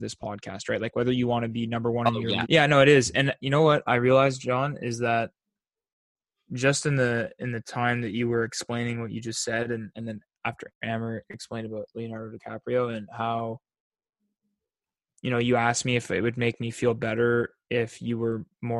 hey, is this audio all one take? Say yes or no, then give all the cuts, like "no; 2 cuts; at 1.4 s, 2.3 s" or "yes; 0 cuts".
no; 1 cut; at 2.4 s